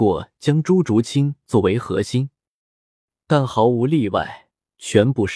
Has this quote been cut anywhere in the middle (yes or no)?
no